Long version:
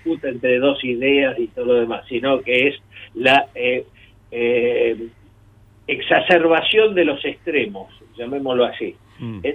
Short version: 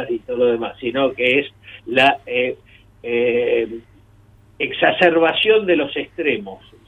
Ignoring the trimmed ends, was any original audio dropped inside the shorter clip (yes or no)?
no